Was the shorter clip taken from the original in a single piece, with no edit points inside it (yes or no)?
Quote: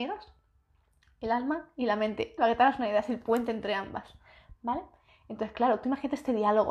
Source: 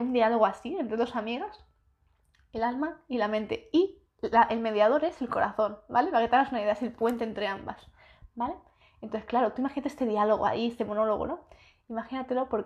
no